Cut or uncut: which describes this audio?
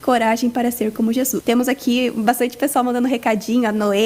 cut